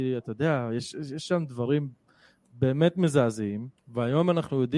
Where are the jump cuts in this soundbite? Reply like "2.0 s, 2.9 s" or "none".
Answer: 3.8 s